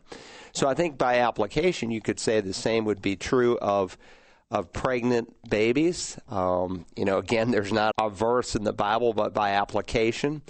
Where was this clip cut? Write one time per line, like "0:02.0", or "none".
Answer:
0:07.9